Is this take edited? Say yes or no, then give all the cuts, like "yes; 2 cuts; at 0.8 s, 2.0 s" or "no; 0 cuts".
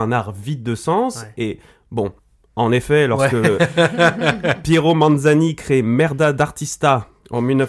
no; 0 cuts